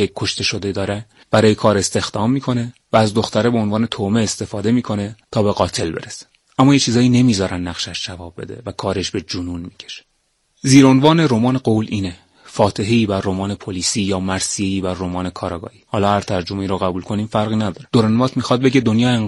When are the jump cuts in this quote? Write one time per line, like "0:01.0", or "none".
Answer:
0:15.9